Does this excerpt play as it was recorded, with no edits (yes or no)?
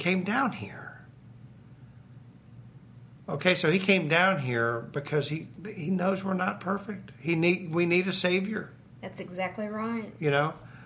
yes